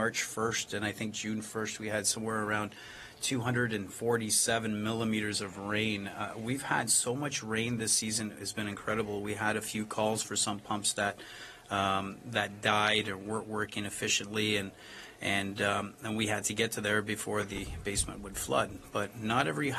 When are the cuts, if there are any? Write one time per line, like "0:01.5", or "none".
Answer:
none